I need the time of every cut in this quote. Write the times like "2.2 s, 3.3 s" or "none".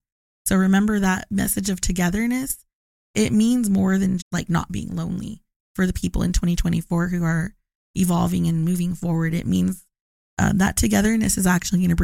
4.2 s